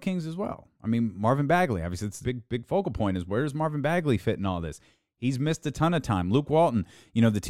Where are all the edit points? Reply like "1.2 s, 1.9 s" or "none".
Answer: 2.2 s